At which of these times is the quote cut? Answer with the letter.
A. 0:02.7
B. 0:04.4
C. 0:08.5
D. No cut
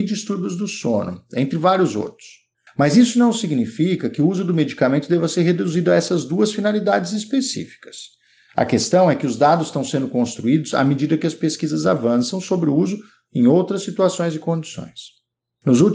A